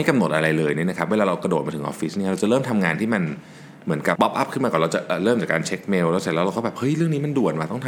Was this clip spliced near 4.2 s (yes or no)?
yes